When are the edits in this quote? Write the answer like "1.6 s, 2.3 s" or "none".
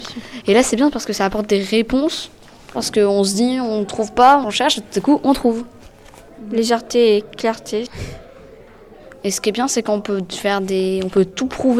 4.4 s